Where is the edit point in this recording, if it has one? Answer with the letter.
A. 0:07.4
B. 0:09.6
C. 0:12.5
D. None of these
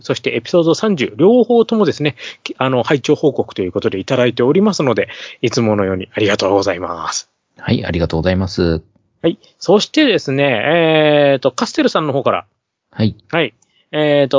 D